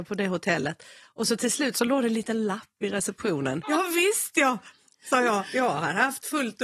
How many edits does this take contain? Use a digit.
1